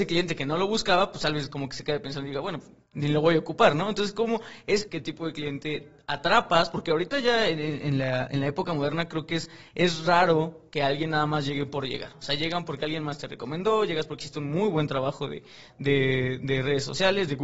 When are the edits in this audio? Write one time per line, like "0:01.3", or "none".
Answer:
0:04.9